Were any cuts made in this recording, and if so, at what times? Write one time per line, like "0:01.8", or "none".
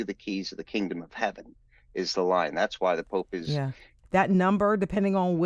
0:04.0